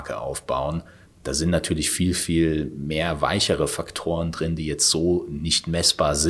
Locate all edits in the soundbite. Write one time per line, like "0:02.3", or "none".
none